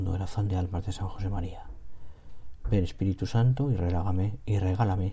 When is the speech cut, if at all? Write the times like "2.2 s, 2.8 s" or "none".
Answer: none